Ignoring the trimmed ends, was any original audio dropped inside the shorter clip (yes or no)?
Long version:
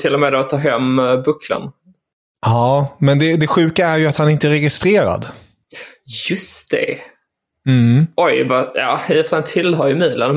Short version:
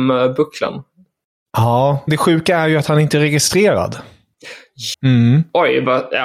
yes